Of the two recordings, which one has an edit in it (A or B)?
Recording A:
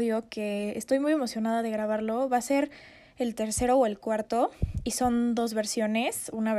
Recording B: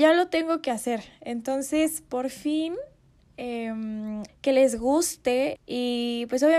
B